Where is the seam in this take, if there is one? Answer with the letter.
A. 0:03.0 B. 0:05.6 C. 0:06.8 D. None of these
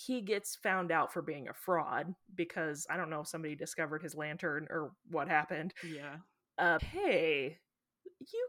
C